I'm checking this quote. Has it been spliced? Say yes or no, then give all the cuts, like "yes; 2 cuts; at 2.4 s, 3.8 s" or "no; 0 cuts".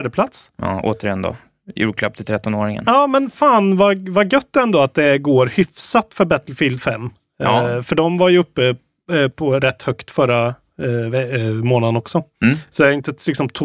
no; 0 cuts